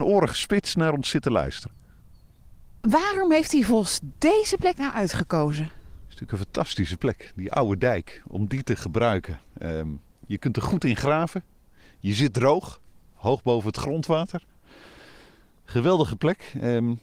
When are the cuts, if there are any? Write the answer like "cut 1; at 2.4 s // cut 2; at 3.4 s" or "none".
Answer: none